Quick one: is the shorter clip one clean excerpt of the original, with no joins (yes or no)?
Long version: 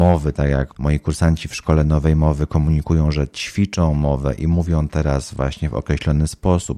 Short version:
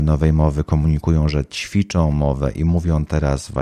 yes